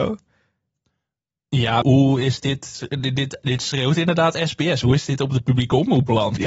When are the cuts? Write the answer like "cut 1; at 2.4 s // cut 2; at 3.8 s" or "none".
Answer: cut 1; at 1.8 s